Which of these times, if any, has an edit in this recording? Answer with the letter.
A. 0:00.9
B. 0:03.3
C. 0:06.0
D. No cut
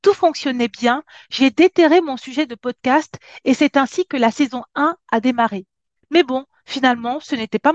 C